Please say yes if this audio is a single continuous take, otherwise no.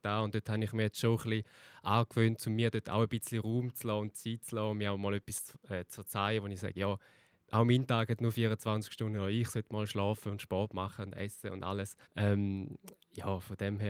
no